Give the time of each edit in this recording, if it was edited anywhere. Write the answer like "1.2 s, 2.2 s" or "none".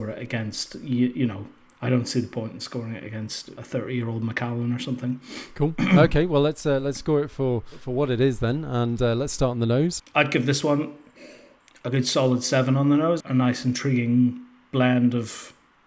10.0 s, 13.2 s

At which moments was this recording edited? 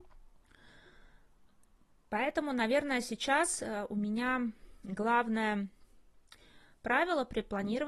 none

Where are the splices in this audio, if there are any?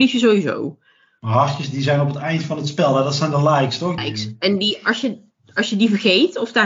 4.0 s

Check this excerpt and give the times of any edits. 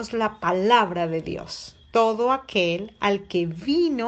none

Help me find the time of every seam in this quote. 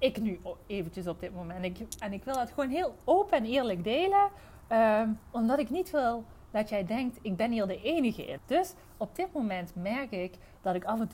8.4 s

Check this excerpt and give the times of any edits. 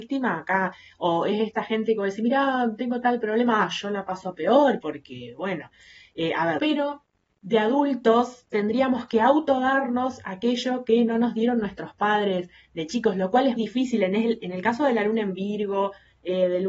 6.6 s, 13.6 s

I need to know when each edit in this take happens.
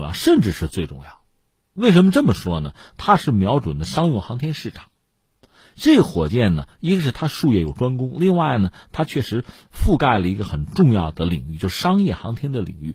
none

